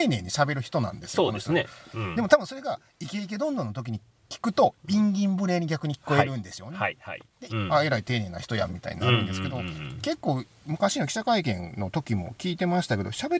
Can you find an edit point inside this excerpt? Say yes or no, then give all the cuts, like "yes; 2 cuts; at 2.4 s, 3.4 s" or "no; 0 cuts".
yes; 1 cut; at 7.5 s